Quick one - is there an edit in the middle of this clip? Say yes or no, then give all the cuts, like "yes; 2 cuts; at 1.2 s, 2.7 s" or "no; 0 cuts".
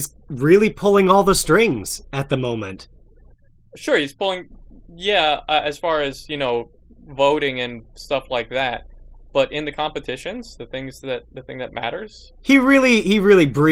no; 0 cuts